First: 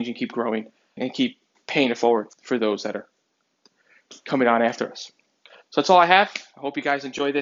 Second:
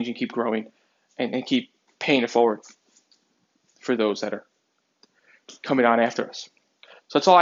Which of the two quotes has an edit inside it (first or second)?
first